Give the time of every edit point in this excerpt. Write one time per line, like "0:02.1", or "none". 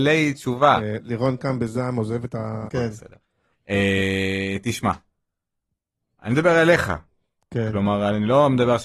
0:02.7